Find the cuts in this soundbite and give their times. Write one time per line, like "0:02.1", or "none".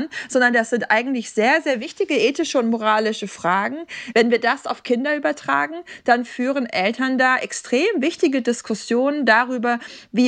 0:04.1